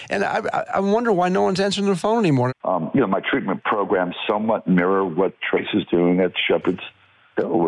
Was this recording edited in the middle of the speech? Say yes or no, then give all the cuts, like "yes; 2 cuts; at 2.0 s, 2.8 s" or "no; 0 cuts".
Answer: yes; 1 cut; at 2.5 s